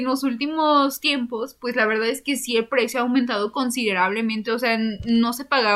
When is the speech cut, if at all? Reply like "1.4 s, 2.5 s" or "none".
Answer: none

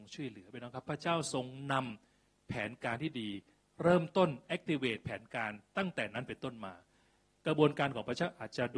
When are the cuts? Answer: none

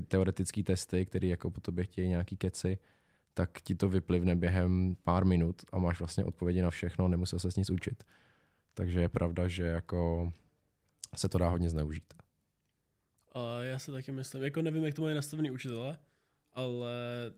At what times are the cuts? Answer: none

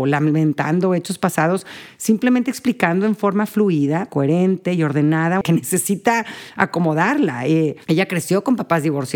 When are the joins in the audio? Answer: 4.1 s, 5.4 s

